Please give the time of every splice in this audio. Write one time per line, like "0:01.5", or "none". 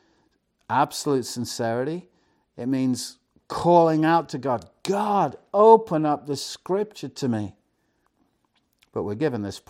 none